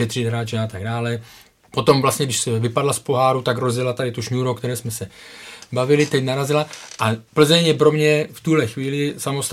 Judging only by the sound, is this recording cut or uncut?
cut